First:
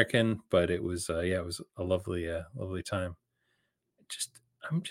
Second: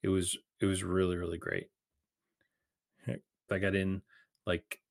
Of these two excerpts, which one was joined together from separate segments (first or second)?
second